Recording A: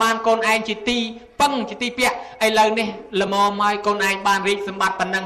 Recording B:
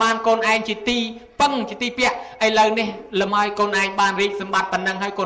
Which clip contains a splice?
B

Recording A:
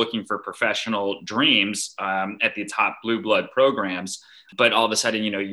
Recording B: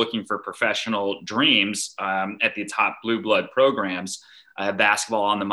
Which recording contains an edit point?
A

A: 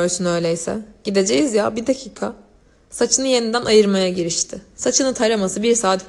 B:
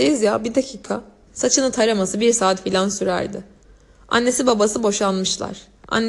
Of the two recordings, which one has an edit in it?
B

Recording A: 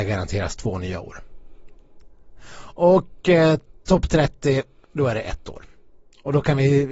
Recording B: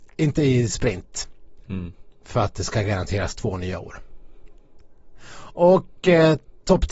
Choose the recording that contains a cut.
B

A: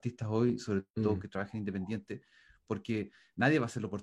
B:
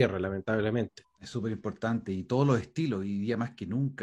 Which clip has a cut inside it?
B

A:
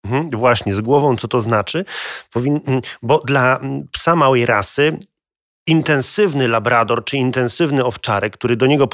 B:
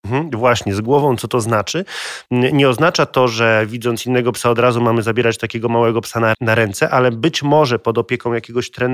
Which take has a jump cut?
B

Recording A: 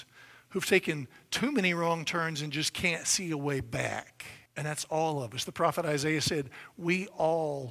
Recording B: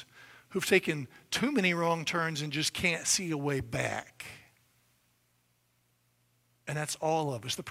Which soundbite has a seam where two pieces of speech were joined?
A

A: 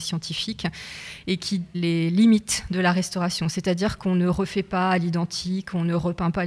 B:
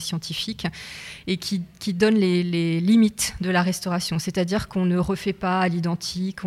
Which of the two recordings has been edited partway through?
A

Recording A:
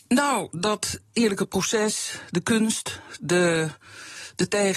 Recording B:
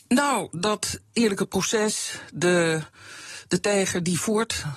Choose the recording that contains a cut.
B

